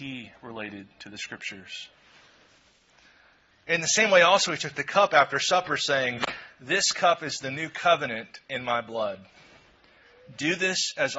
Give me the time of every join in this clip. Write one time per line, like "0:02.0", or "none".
0:03.5